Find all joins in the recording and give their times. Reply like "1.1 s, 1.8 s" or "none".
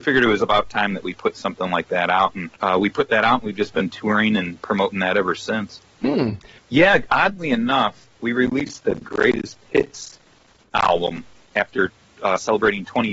2.6 s, 6.6 s, 8.1 s